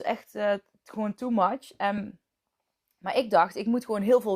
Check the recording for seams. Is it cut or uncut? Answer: uncut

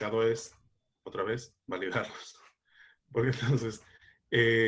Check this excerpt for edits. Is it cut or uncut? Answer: uncut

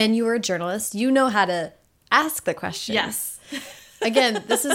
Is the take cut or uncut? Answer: uncut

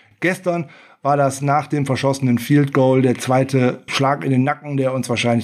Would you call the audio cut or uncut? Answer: cut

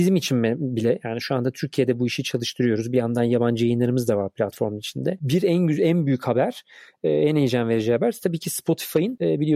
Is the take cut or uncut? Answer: uncut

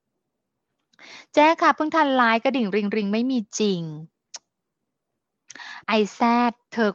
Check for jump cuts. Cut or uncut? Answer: cut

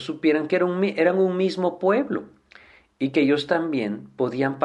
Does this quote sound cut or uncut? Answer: uncut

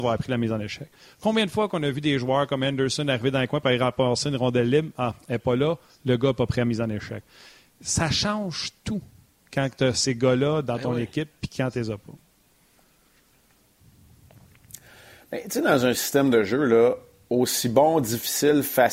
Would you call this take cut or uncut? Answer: uncut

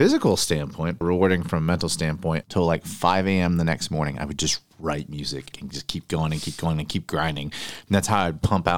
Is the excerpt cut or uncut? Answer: cut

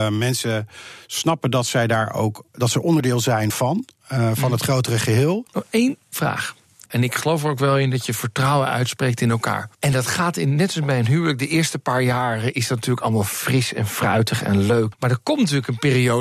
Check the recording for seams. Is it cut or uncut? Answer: cut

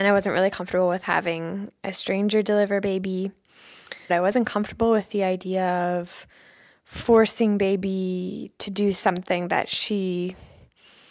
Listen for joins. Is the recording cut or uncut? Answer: cut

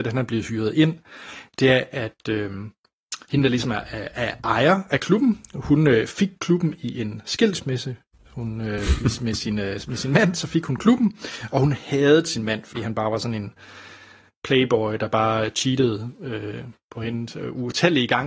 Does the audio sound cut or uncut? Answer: uncut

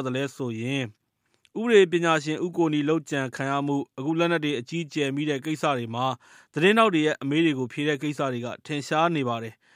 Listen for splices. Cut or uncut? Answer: uncut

